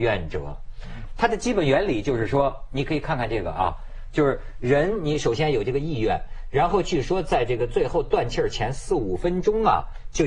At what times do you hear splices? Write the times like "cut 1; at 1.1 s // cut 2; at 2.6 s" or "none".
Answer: cut 1; at 1.1 s